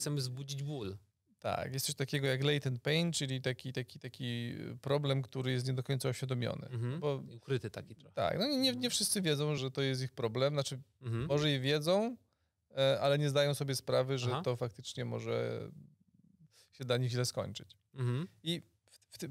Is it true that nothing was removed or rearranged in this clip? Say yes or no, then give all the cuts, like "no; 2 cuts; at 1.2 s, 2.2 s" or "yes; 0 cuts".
no; 1 cut; at 9.6 s